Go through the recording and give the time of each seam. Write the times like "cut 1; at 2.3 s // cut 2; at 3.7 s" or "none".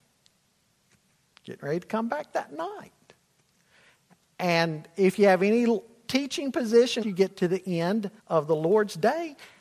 cut 1; at 7.0 s // cut 2; at 8.2 s